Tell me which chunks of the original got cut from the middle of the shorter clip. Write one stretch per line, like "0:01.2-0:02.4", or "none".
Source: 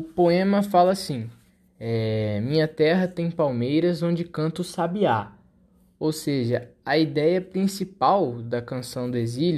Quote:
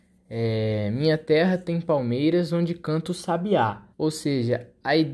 0:05.4-0:05.9